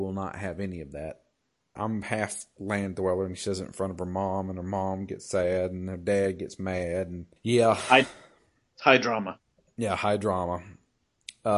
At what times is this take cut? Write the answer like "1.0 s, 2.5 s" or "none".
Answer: 1.8 s, 7.4 s